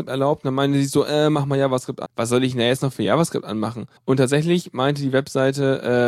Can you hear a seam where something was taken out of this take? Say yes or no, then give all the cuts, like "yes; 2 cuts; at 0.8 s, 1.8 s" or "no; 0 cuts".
yes; 2 cuts; at 2.1 s, 4.0 s